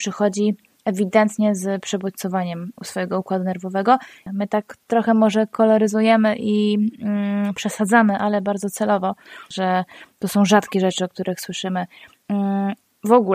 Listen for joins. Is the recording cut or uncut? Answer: cut